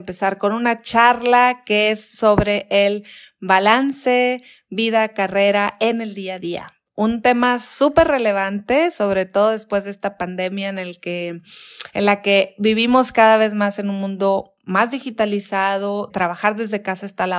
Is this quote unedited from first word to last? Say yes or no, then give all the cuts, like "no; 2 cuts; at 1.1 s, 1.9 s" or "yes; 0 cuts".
no; 1 cut; at 16.1 s